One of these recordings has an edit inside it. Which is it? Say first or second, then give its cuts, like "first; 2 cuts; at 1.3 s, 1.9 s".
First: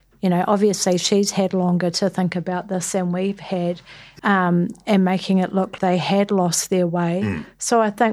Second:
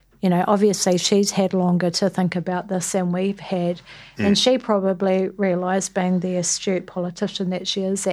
first; 2 cuts; at 4.2 s, 5.8 s